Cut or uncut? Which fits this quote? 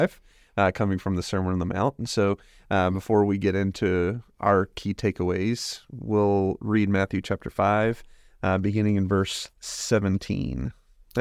uncut